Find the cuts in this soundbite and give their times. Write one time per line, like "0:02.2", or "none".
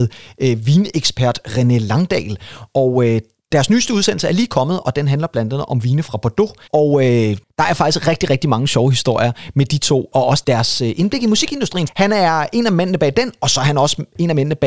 0:06.7
0:11.9